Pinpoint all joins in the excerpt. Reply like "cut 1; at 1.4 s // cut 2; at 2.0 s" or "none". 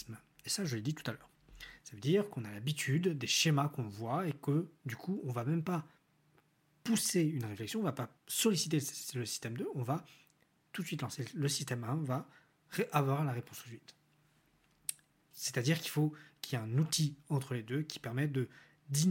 cut 1; at 8.2 s // cut 2; at 15.3 s